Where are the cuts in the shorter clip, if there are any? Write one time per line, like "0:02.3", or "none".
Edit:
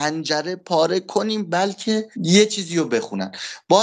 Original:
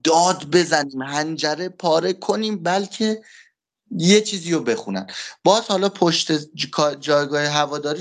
0:02.1